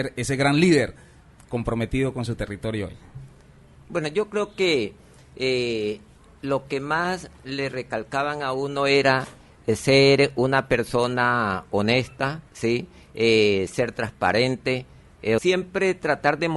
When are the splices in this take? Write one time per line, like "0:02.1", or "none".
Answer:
0:12.5
0:15.4